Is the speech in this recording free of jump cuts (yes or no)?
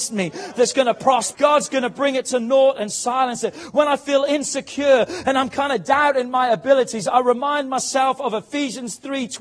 no